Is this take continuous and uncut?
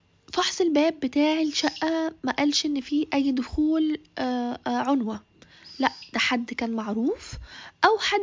yes; 0 cuts

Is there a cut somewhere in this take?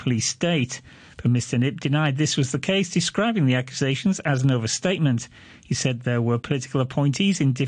no; 0 cuts

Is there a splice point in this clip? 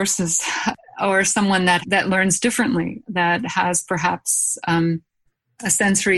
no; 0 cuts

